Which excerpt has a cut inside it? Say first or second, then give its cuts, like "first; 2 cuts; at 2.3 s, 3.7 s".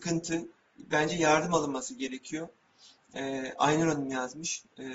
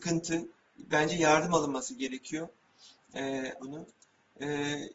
second; 1 cut; at 3.6 s